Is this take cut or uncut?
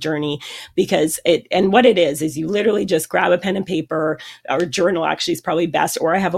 uncut